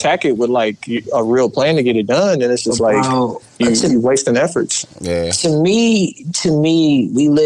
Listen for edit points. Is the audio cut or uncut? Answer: uncut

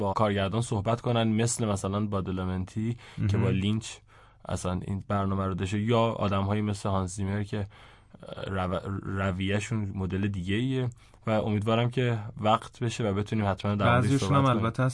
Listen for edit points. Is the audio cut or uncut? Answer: uncut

